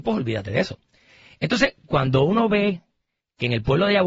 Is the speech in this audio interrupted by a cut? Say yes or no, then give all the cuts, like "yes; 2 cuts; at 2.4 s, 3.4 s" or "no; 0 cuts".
no; 0 cuts